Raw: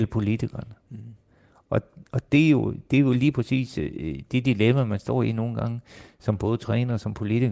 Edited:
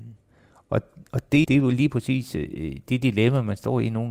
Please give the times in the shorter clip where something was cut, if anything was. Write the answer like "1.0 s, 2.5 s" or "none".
1.4 s